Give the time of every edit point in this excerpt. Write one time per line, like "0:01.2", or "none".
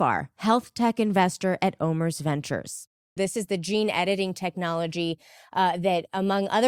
0:03.2